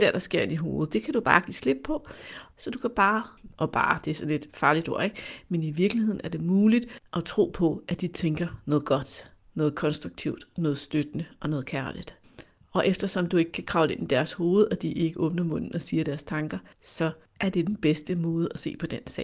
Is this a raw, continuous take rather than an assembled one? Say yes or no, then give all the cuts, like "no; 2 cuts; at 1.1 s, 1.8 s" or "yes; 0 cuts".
no; 1 cut; at 2.5 s